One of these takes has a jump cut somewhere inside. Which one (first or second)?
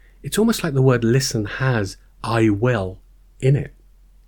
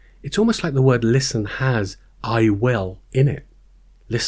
second